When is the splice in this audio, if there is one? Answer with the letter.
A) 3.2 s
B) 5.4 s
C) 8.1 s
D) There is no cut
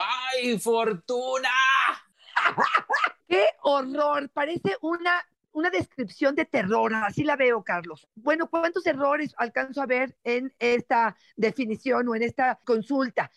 A